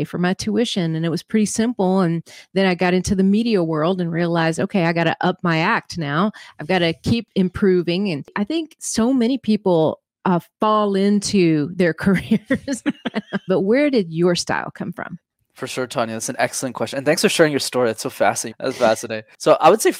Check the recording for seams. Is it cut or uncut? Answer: cut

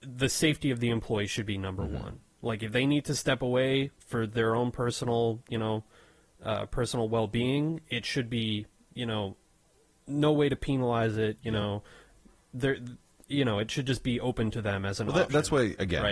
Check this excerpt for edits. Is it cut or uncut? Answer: uncut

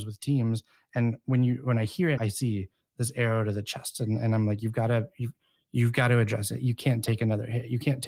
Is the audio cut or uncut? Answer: cut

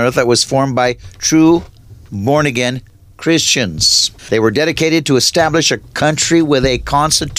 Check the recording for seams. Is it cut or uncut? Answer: cut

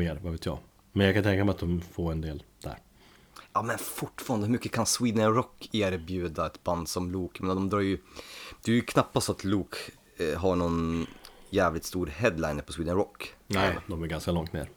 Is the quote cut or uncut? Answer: uncut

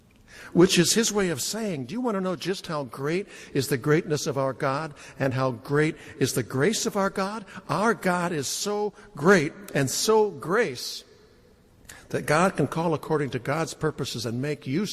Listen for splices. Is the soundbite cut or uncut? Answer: uncut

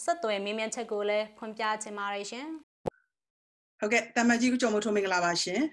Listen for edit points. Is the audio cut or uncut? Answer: cut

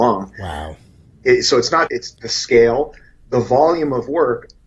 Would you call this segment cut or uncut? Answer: cut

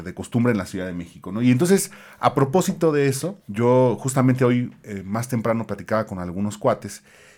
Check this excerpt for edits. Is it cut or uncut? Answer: cut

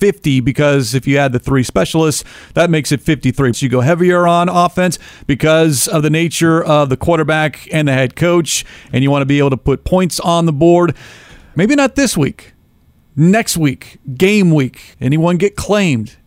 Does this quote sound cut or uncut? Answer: cut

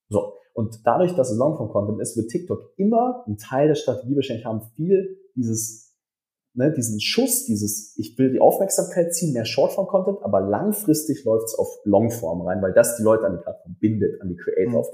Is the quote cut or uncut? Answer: uncut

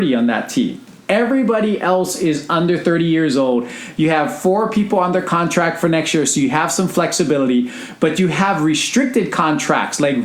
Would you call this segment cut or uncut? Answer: uncut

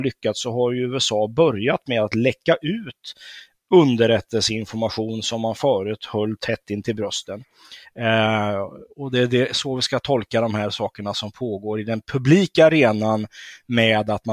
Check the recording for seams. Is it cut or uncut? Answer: cut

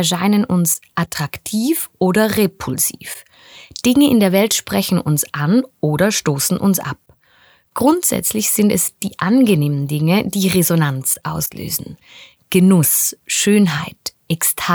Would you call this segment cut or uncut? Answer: uncut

